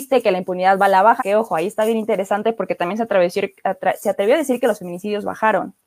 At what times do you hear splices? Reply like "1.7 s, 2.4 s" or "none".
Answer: 1.2 s

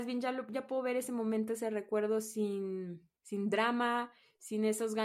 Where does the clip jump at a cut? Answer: 3.2 s

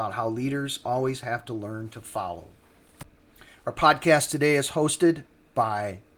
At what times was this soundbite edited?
none

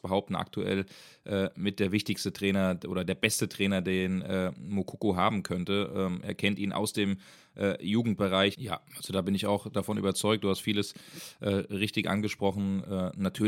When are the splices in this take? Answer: 8.5 s

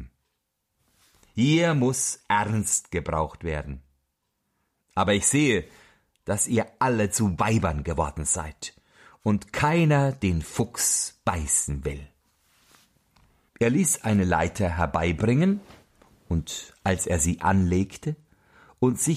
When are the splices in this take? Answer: 13.5 s

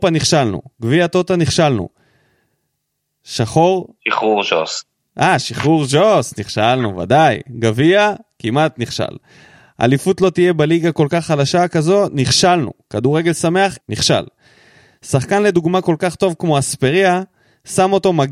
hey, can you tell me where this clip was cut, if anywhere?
4.0 s, 13.8 s

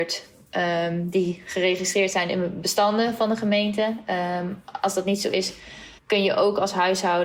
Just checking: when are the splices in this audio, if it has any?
6.0 s

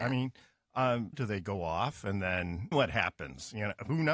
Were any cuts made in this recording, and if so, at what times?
1.1 s, 2.7 s

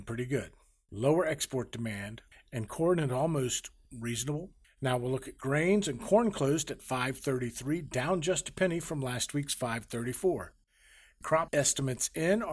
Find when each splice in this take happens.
2.3 s, 4.6 s

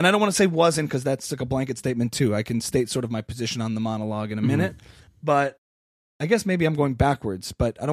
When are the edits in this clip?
none

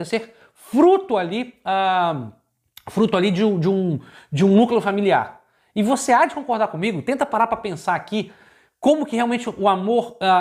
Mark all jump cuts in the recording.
none

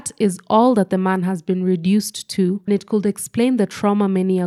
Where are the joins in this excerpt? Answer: 2.7 s

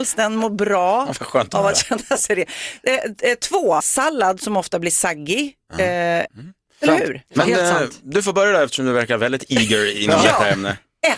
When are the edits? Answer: 3.8 s, 6.3 s

